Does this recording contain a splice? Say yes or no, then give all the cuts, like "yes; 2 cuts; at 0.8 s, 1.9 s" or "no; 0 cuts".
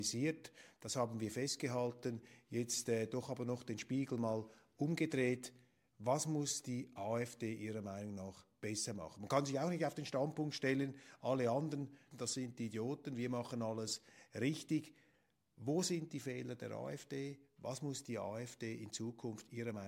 yes; 1 cut; at 12.1 s